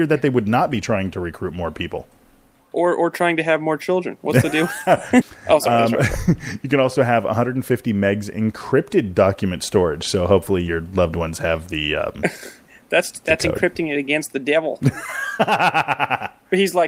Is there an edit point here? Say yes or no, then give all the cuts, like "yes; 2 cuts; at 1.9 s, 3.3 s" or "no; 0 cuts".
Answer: yes; 1 cut; at 5.2 s